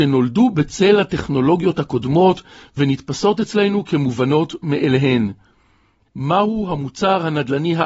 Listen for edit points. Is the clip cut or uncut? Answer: cut